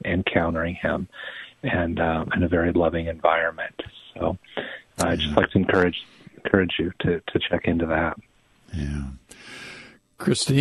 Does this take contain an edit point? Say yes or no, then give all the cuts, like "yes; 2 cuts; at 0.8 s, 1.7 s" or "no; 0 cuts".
no; 0 cuts